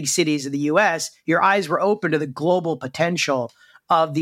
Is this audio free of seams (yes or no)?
yes